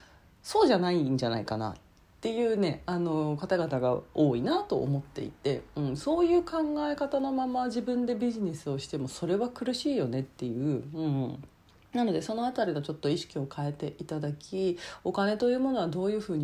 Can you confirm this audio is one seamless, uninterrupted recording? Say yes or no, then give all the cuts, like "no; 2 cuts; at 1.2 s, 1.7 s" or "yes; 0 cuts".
yes; 0 cuts